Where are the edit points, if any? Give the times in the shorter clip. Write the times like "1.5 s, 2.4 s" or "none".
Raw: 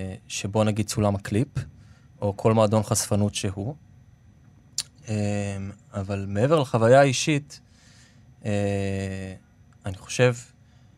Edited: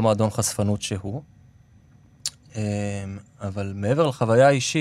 none